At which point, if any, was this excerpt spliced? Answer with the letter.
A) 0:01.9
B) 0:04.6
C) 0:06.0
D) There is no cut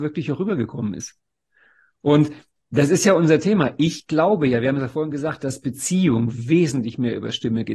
D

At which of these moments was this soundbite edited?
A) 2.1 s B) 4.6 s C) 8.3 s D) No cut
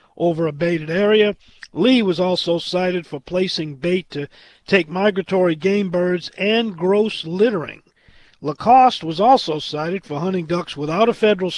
D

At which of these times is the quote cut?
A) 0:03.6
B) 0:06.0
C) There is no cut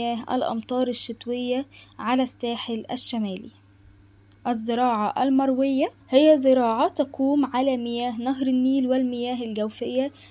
B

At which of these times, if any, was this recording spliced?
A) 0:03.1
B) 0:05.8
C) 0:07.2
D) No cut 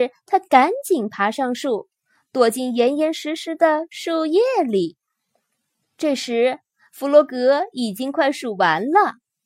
B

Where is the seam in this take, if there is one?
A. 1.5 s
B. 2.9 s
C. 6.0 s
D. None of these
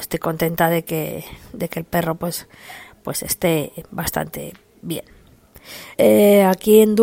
C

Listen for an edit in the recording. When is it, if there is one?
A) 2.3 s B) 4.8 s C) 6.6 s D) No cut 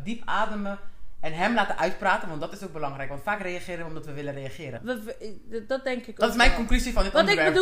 B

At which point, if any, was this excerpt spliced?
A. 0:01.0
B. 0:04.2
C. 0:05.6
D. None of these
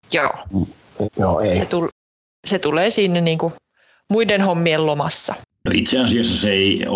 A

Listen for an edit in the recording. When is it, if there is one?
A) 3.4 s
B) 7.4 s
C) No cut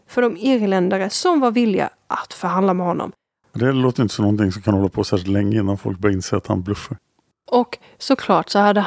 A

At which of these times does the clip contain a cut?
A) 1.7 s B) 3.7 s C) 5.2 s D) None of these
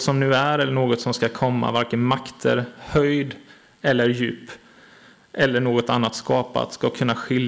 D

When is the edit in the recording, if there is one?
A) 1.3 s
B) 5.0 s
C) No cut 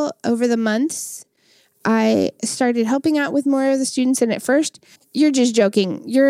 B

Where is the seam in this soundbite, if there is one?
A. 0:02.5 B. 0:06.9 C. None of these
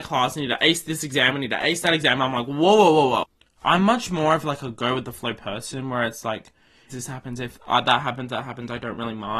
B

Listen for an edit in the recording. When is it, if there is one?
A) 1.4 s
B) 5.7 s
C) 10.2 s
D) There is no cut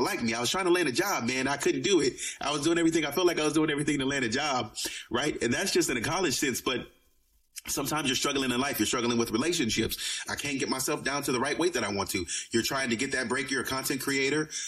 C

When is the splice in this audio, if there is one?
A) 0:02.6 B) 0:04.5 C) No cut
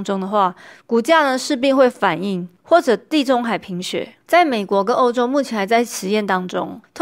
A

